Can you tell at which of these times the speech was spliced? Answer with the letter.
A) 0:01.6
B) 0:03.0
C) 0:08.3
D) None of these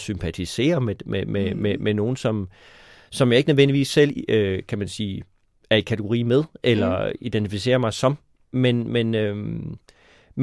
D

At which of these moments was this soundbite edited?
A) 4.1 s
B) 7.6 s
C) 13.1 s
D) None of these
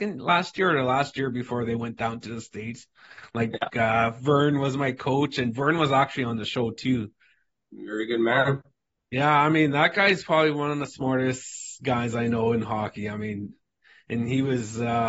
B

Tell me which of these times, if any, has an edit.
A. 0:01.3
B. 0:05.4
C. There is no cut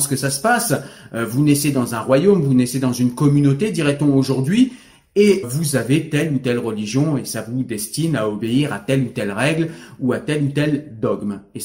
B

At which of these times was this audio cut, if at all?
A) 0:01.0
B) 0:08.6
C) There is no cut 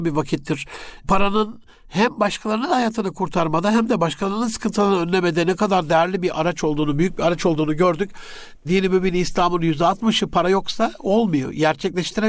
C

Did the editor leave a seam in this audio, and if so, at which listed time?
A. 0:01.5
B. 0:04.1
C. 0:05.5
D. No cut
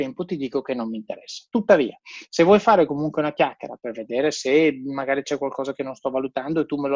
D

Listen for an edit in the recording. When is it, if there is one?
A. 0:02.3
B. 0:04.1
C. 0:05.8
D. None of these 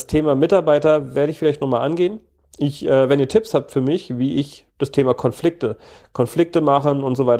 D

